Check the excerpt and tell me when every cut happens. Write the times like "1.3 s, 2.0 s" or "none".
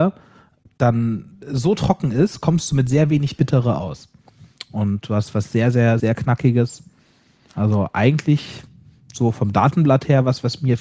6.0 s